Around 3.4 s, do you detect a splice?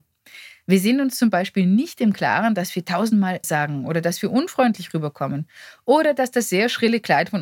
yes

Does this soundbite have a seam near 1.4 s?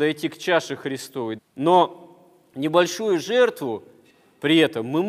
yes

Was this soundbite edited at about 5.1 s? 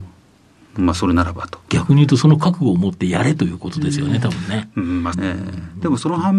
yes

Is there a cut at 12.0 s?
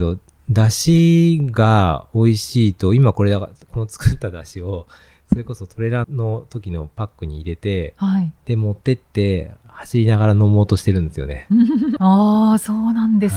yes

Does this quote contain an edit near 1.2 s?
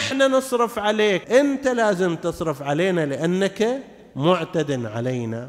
yes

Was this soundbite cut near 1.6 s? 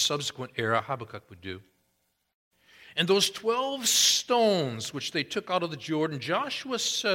no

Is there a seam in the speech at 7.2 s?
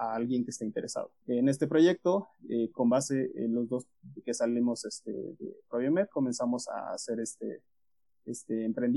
no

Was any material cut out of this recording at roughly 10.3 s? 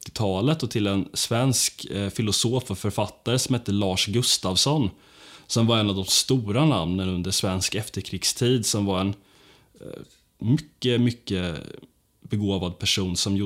no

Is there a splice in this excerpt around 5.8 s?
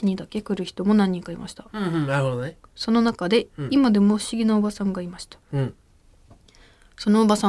no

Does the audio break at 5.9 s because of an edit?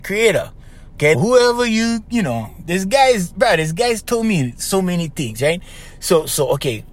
no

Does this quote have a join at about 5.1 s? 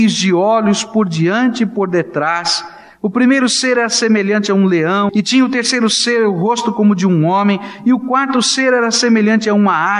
yes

